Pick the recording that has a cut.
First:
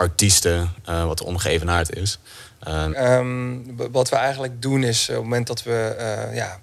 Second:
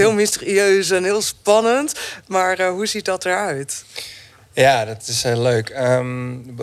first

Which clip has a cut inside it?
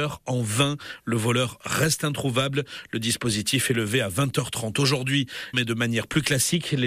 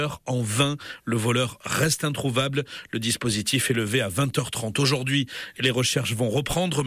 first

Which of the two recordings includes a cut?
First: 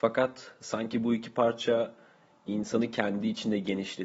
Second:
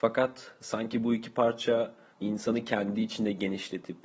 second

